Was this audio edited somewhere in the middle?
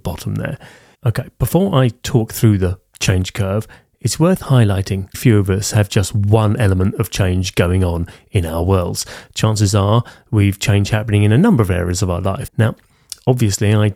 yes; 2 cuts; at 5.1 s, 12.5 s

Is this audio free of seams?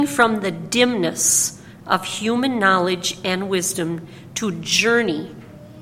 yes; 0 cuts

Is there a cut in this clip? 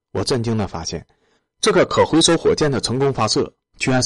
no; 0 cuts

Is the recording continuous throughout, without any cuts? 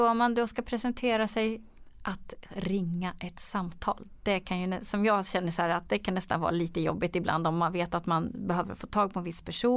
yes; 0 cuts

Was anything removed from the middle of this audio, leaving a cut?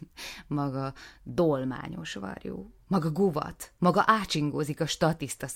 no; 0 cuts

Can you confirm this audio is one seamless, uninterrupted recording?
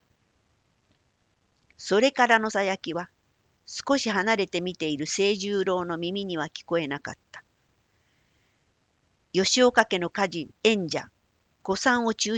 no; 2 cuts; at 2.5 s, 10.6 s

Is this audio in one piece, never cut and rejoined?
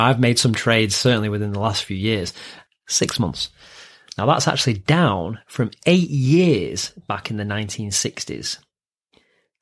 no; 1 cut; at 2.7 s

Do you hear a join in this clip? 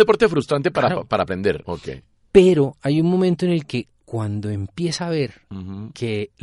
yes; 1 cut; at 1.6 s

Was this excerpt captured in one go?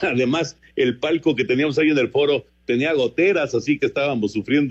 yes; 0 cuts

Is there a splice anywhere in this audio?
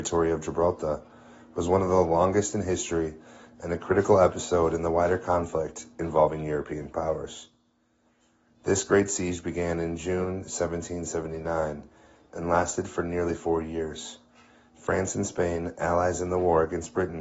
no; 0 cuts

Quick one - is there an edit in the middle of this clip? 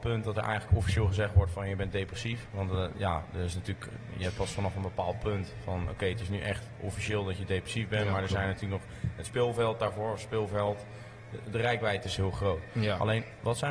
no; 0 cuts

